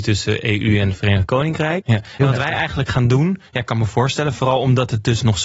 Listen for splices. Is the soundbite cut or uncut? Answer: cut